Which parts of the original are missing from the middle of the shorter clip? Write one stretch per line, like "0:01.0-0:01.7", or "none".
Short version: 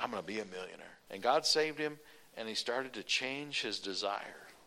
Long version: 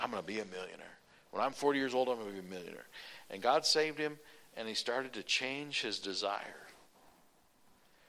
0:01.1-0:03.3